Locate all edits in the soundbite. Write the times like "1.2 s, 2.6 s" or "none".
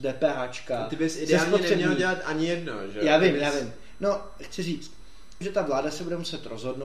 5.4 s